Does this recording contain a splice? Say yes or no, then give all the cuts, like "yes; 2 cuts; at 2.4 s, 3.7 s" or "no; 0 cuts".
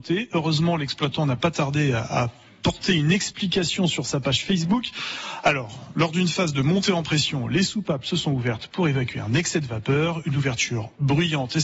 no; 0 cuts